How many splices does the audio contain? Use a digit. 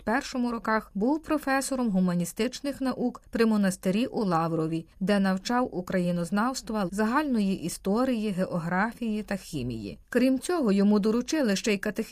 1